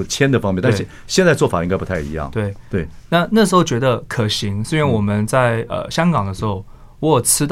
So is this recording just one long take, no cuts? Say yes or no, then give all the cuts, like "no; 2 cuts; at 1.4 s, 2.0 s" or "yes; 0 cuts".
yes; 0 cuts